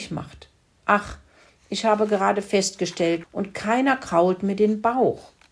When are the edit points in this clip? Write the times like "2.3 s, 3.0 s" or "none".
3.2 s